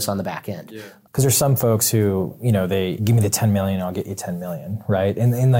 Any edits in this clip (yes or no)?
yes